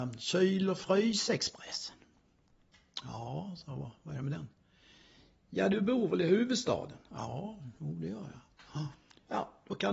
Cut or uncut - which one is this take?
uncut